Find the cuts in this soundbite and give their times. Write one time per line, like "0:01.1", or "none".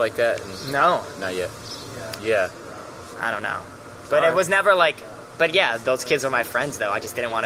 0:02.2